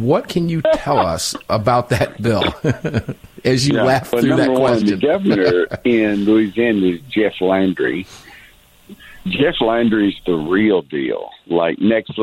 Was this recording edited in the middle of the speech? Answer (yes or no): no